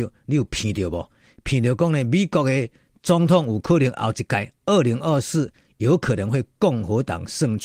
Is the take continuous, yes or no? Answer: yes